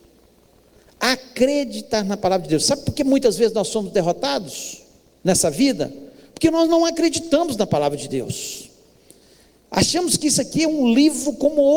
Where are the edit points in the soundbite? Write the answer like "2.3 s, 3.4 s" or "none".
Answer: none